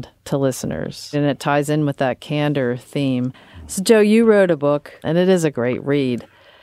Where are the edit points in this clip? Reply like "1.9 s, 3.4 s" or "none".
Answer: 1.1 s, 5.0 s

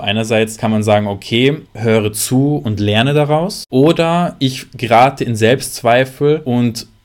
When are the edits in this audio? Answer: 1.7 s

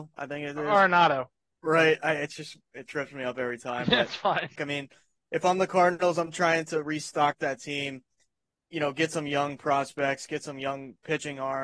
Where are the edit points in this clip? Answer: 4.6 s

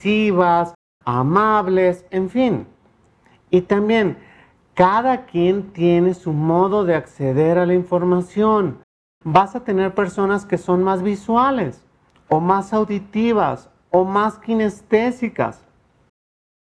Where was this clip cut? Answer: none

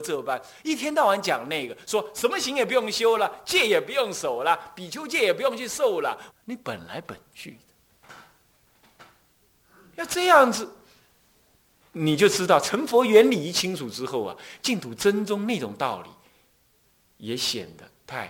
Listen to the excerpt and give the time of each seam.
6.3 s

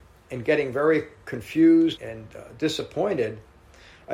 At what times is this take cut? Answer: 2.0 s

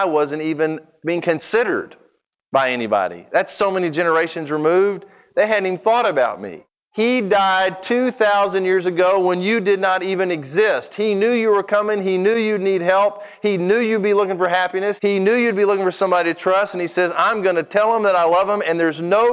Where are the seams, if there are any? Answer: 15.0 s

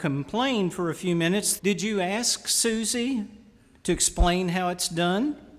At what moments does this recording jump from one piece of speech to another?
1.6 s

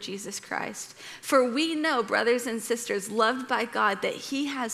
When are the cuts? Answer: none

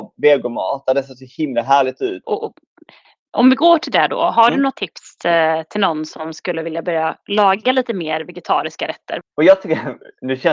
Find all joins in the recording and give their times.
2.2 s, 9.2 s

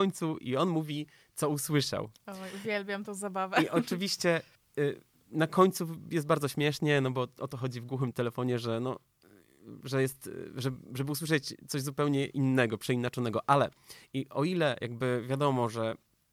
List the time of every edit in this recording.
8.1 s

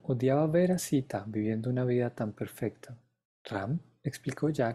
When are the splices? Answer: 3.2 s

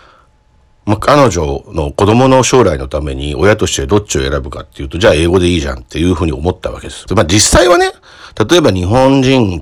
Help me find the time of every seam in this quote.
7.1 s

